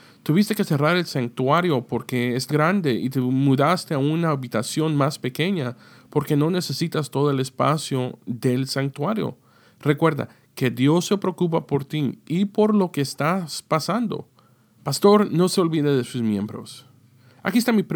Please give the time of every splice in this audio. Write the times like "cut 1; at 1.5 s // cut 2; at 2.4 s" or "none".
cut 1; at 2.5 s // cut 2; at 14.8 s